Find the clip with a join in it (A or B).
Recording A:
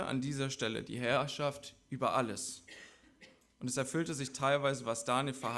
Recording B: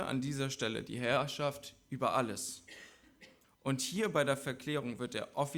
B